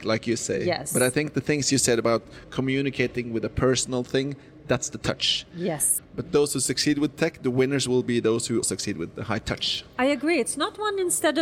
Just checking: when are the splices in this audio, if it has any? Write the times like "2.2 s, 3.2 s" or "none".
6.0 s, 8.6 s

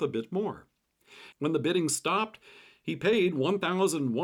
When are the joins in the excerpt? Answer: 1.3 s

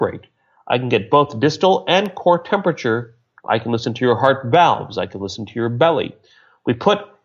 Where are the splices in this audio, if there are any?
3.4 s

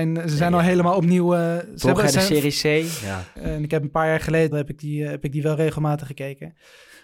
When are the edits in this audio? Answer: 3.4 s, 4.5 s

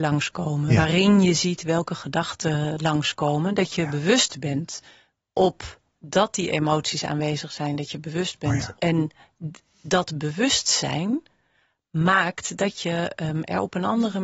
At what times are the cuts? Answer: 8.8 s

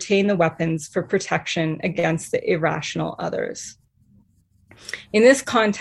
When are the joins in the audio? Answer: none

